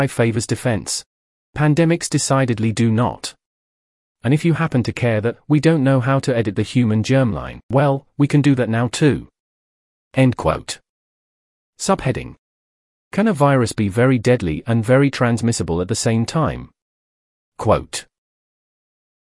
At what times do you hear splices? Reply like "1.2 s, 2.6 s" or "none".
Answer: none

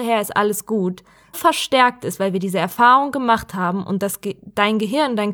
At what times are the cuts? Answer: 1.3 s

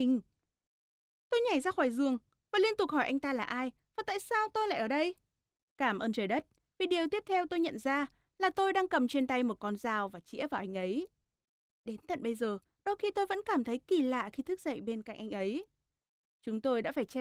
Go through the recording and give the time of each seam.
5.6 s

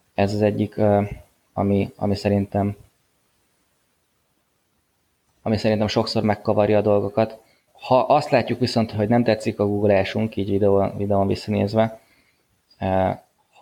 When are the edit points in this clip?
7.7 s, 8.9 s

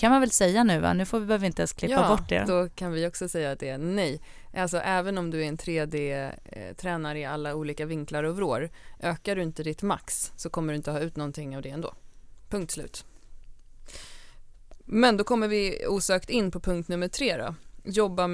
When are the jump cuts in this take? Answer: 2.5 s

